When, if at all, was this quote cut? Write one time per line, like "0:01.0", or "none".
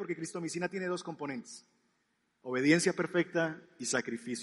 none